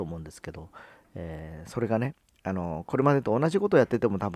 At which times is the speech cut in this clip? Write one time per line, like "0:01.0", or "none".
none